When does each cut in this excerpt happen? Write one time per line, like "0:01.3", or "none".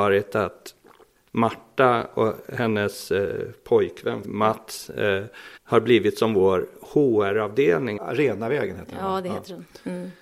0:04.2
0:05.6
0:08.0